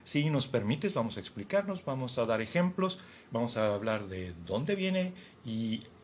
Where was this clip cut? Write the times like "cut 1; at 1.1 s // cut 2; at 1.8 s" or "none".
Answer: none